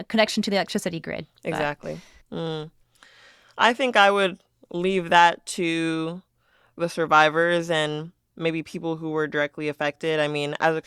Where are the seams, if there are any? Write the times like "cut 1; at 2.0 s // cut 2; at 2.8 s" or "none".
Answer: cut 1; at 2.2 s